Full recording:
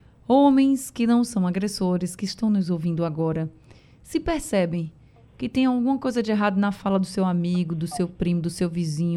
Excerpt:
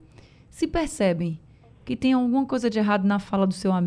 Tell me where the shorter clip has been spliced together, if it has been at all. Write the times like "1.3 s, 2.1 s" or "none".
none